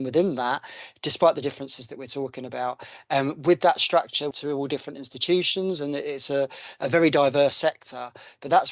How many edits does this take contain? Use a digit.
1